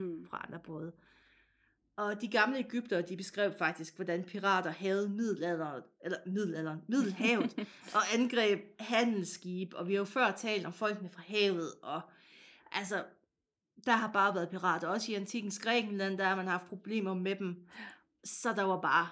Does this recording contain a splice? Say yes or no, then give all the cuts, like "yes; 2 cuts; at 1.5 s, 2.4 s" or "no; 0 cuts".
no; 0 cuts